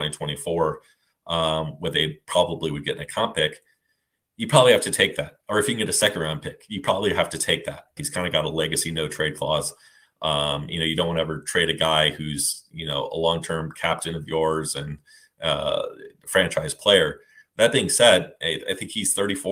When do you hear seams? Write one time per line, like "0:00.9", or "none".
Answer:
0:08.0